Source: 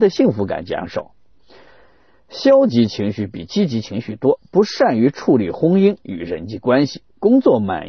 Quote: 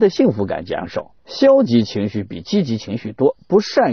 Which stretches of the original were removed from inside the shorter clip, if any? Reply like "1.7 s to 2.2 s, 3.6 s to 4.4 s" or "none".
1.2 s to 2.2 s